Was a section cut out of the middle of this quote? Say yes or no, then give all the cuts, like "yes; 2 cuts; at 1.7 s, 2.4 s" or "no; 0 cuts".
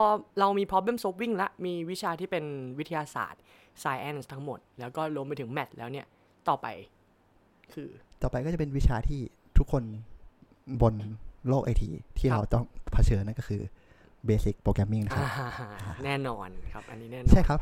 no; 0 cuts